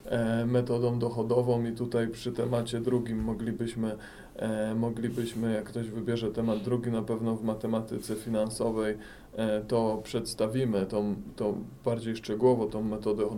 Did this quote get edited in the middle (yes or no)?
no